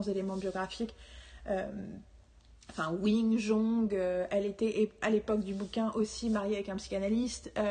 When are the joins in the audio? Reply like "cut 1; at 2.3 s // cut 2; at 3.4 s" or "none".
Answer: none